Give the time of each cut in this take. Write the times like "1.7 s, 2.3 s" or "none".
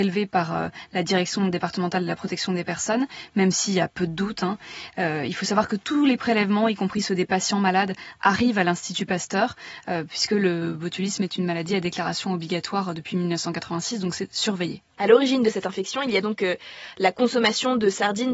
none